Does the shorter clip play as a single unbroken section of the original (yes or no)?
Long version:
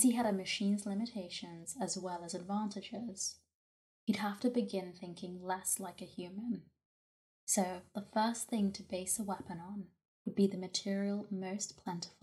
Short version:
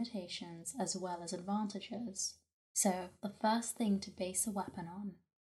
no